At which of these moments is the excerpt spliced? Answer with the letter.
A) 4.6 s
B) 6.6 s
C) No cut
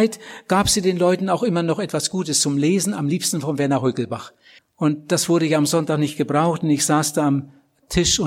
A